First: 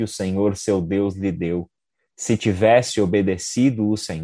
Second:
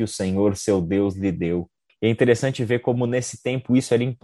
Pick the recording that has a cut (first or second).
second